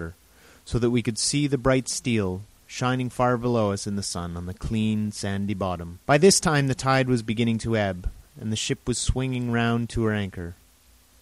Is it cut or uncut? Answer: cut